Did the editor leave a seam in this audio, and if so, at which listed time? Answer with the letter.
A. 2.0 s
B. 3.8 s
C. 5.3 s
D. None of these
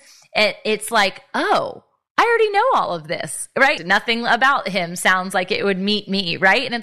B